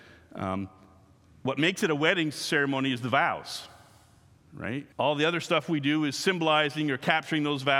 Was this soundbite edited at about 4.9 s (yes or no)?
yes